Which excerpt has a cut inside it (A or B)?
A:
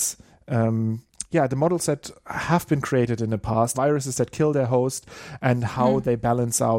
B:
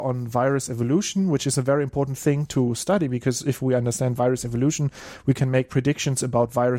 A